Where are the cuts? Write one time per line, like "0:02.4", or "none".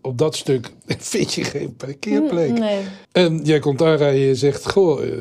0:03.0